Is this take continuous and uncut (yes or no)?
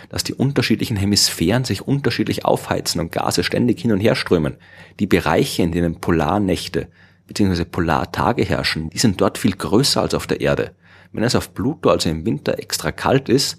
no